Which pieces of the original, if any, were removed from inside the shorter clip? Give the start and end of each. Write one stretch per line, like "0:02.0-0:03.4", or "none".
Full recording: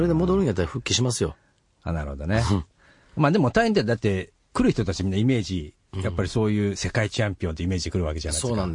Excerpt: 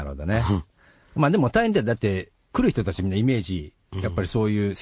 none